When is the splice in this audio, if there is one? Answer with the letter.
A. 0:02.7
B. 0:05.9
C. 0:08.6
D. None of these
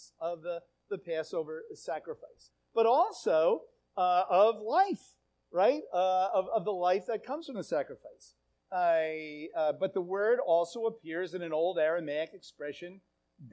C